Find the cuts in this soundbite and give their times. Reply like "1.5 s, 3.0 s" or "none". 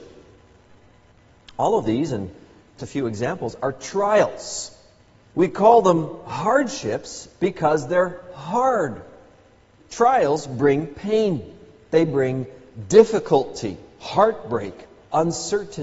2.8 s, 5.3 s, 9.8 s